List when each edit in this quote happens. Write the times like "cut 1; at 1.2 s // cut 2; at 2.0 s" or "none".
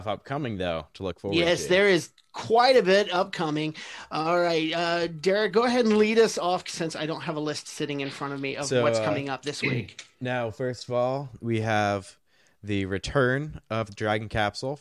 none